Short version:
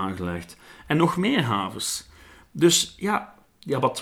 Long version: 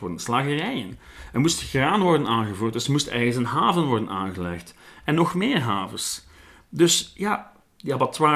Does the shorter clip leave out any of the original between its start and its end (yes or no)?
no